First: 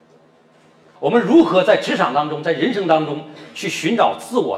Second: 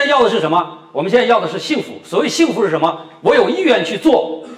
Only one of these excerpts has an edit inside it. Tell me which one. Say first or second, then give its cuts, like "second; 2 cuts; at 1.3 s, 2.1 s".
first; 1 cut; at 1.0 s